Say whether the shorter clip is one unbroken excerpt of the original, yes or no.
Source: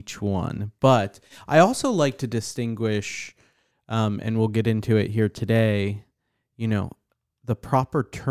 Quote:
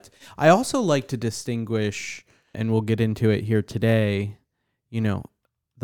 no